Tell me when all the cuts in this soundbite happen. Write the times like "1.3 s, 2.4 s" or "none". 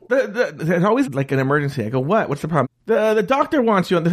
1.0 s, 2.6 s